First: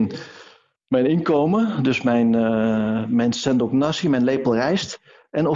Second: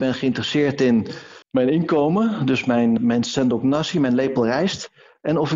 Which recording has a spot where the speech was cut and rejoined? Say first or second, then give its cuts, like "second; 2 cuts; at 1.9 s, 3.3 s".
second; 2 cuts; at 1.4 s, 3.0 s